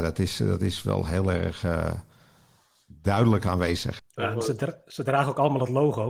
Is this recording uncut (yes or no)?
no